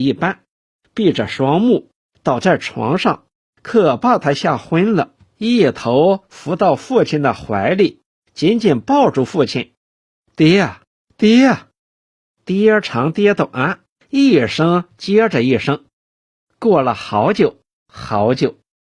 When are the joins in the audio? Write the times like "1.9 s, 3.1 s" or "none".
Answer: none

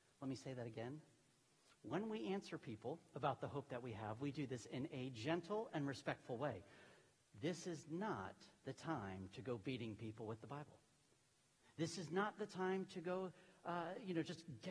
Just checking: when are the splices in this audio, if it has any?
none

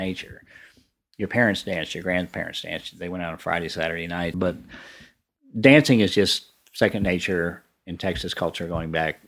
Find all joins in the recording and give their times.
4.3 s

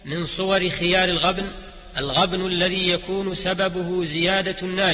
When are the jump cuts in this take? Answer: none

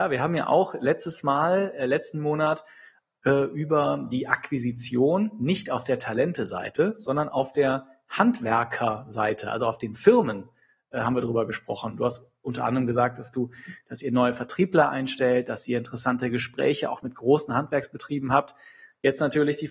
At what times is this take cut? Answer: none

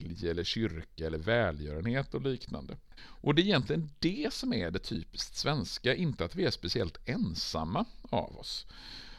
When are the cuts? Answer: 3.0 s

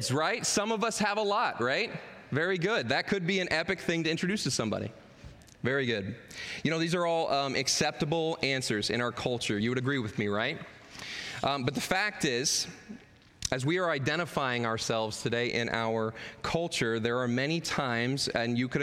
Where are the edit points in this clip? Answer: none

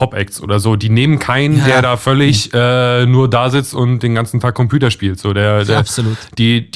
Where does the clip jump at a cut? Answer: none

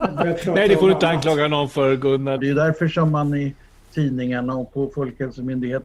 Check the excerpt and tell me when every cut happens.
2.4 s

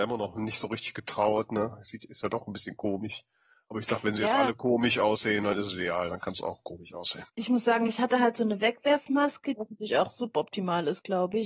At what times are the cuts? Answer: 7.3 s, 9.6 s

